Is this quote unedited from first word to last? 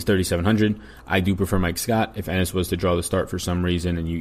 yes; 0 cuts

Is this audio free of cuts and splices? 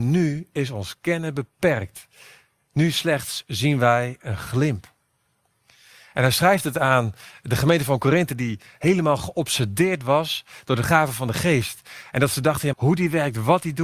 no; 1 cut; at 12.7 s

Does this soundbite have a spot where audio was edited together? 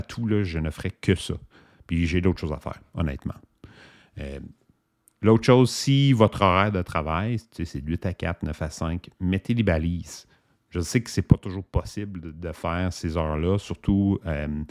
no; 0 cuts

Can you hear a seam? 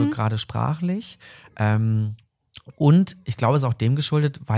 no; 0 cuts

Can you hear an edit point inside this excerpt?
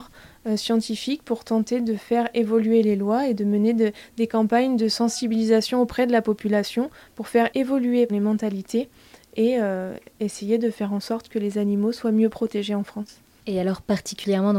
no; 0 cuts

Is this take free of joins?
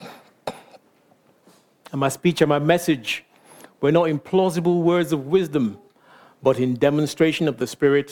no; 1 cut; at 1.9 s

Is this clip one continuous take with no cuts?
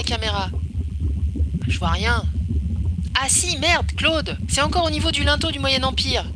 yes; 0 cuts

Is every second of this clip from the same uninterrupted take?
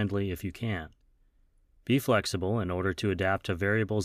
yes; 0 cuts

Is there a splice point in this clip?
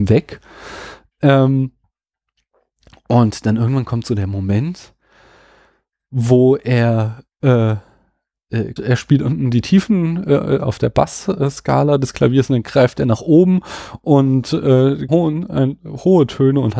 yes; 3 cuts; at 8.8 s, 10.6 s, 15.1 s

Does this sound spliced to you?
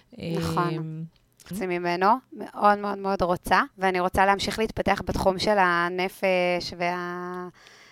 yes; 2 cuts; at 1.5 s, 3.7 s

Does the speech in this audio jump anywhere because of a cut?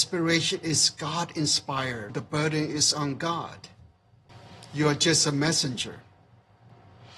yes; 1 cut; at 2.1 s

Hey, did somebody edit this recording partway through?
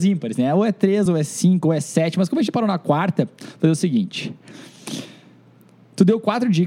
no; 0 cuts

